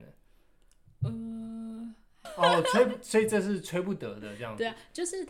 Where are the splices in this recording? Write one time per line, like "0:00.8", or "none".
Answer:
0:02.2